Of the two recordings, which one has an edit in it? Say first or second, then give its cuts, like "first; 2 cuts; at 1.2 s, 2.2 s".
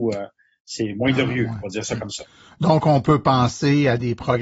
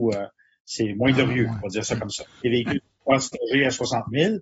second; 1 cut; at 2.4 s